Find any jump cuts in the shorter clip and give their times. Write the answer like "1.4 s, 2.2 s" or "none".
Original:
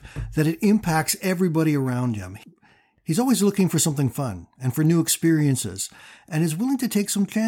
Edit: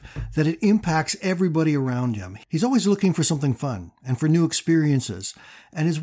2.4 s